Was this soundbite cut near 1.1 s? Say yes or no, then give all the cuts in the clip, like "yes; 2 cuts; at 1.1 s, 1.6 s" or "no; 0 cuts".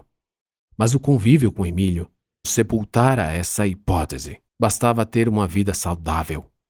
no; 2 cuts; at 2.4 s, 4.5 s